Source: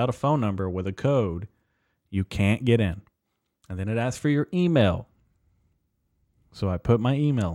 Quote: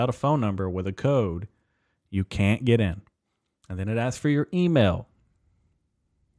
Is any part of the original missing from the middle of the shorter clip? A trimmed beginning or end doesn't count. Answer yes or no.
no